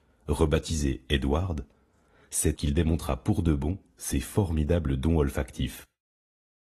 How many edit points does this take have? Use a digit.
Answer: 1